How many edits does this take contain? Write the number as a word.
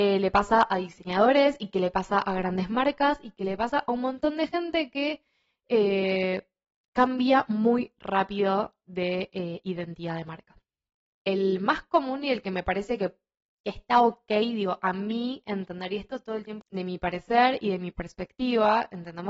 two